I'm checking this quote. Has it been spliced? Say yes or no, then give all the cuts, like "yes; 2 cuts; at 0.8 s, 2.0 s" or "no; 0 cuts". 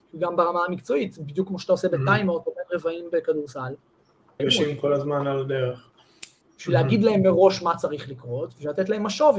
yes; 2 cuts; at 4.4 s, 6.4 s